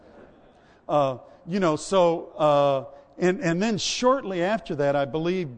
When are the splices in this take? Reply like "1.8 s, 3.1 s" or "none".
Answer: none